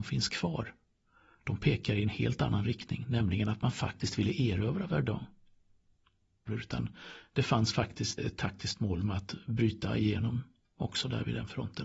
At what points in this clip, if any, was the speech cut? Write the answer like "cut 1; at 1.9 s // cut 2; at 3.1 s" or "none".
cut 1; at 6.5 s // cut 2; at 8.2 s